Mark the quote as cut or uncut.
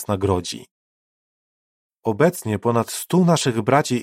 cut